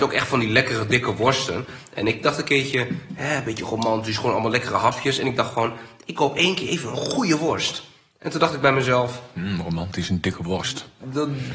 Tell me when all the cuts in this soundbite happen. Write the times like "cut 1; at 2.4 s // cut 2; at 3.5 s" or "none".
none